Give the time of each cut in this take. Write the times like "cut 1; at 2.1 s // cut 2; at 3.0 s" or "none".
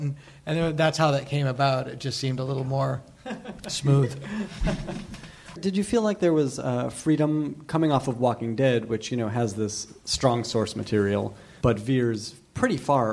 cut 1; at 5.6 s // cut 2; at 11.6 s